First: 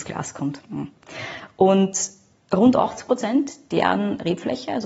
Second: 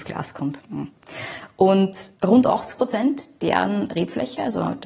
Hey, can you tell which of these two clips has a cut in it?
second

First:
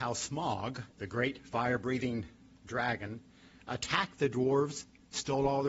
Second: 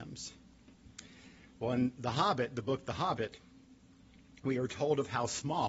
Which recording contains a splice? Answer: first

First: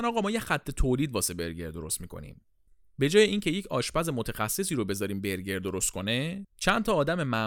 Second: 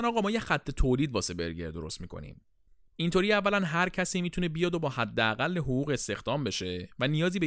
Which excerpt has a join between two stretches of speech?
second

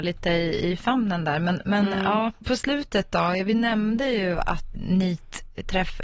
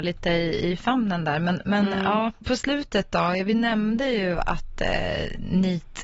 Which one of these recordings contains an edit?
first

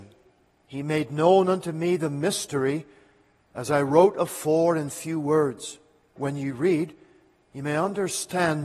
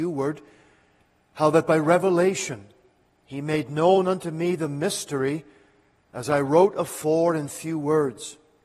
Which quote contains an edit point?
first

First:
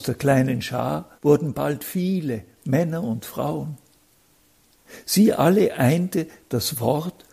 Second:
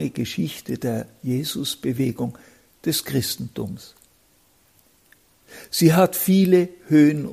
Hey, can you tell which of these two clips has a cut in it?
first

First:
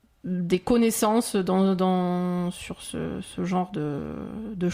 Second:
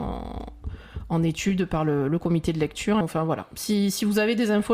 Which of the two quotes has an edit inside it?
second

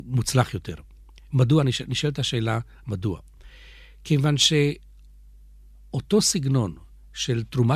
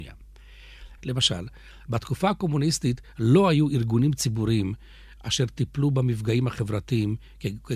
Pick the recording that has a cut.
second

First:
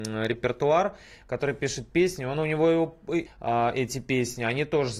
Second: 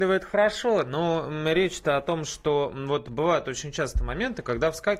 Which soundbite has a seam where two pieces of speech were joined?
first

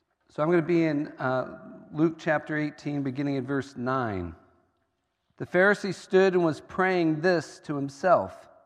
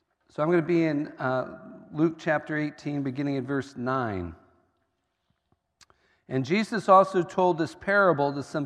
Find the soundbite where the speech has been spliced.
first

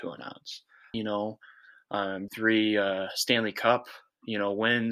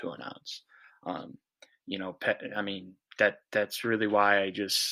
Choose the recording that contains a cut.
first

